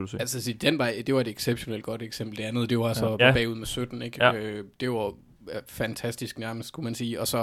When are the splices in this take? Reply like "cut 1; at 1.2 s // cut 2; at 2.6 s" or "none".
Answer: cut 1; at 3.2 s